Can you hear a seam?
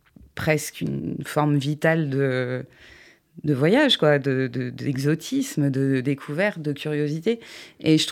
no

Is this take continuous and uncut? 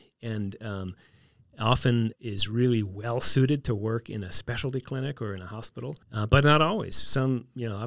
no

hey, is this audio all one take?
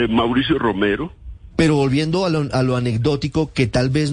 no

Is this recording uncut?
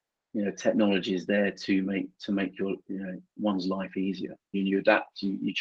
no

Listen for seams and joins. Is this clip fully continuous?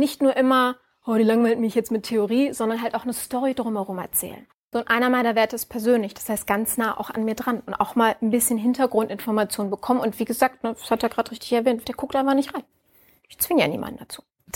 no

